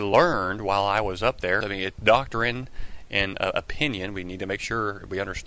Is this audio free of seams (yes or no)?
no